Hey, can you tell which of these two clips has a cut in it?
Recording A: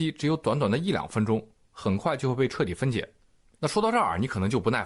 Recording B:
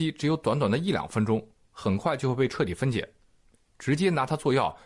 A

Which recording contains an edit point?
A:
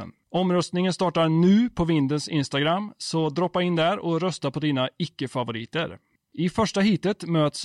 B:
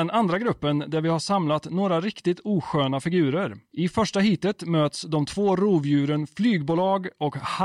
A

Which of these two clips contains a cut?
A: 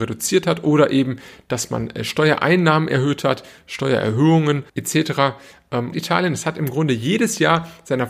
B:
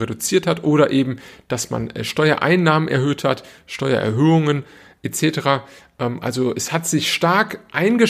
A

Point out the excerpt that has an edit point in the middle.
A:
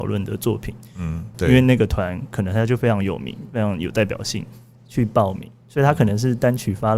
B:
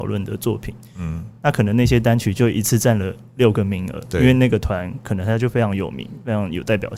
A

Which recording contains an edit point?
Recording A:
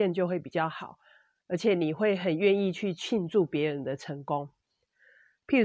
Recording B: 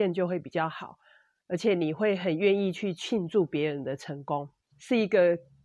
B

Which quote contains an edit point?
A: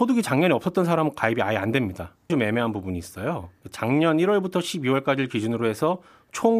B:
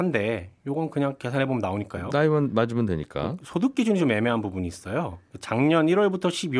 A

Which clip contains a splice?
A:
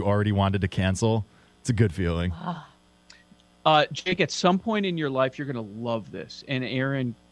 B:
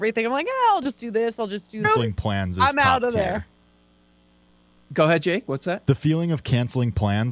B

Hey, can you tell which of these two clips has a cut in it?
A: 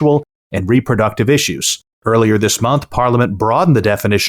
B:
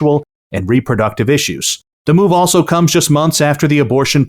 B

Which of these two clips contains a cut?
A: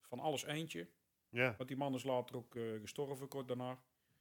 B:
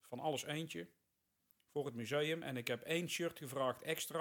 A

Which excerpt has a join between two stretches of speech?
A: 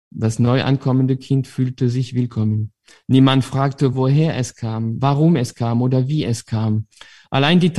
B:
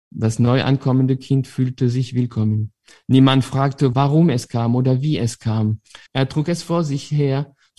B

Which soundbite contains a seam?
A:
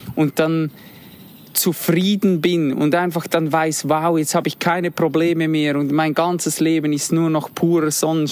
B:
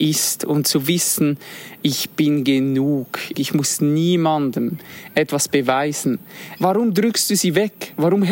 B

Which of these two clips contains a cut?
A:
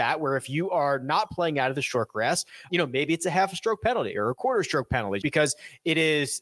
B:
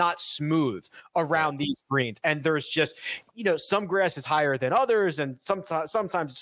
A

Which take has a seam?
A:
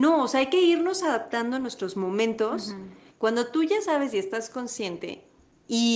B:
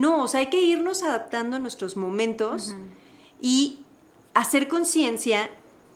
A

